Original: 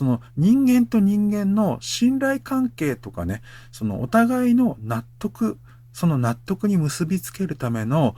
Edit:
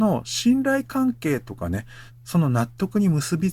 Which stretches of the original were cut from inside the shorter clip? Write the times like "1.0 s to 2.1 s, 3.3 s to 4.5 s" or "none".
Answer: 3.6 s to 5.8 s